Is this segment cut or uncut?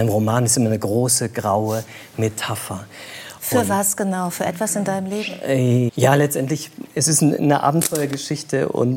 cut